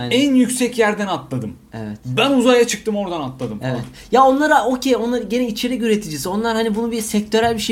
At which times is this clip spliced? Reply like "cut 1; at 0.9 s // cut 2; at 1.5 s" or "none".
none